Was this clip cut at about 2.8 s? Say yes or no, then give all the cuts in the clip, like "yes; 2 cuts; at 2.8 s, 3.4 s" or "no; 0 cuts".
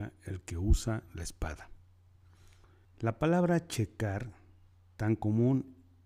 yes; 1 cut; at 2.8 s